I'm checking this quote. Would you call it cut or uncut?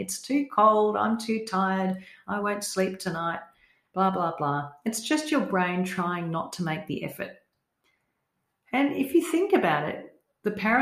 uncut